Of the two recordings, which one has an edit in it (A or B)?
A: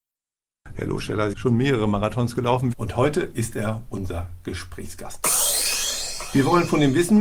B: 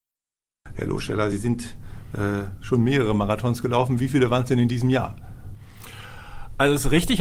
A